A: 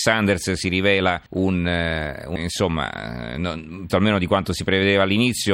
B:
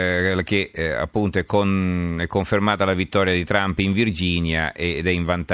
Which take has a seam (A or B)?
A